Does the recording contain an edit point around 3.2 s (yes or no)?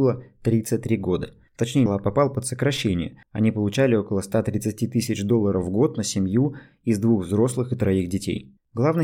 yes